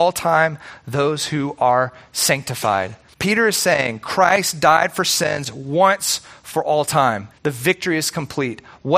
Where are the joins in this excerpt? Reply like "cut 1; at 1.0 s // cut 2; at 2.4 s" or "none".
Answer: cut 1; at 3.1 s // cut 2; at 7.3 s